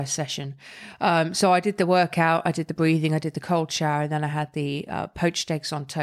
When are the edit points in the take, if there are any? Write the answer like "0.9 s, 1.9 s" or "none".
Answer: none